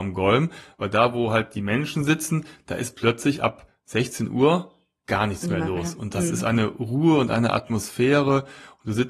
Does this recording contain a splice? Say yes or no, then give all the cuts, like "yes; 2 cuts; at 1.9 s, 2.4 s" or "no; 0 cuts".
no; 0 cuts